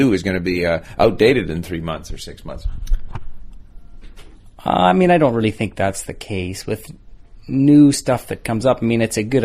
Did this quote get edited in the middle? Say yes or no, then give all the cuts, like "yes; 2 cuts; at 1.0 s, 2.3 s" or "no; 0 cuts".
no; 0 cuts